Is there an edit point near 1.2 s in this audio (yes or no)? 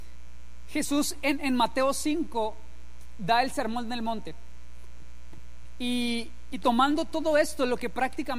no